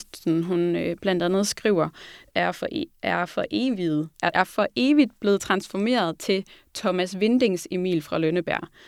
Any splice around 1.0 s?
no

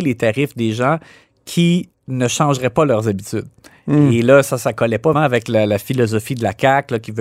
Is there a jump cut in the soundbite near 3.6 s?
no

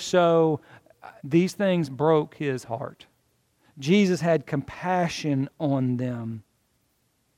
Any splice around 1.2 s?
yes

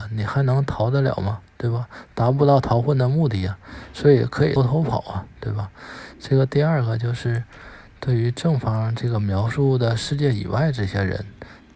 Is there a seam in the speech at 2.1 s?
no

